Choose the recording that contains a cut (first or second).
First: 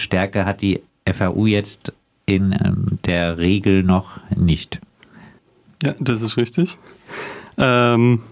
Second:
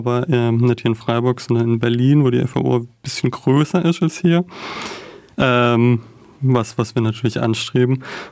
second